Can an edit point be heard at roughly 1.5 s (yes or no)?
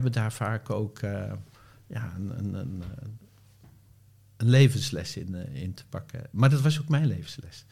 no